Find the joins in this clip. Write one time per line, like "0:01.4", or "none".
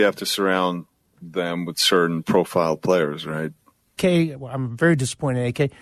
0:04.0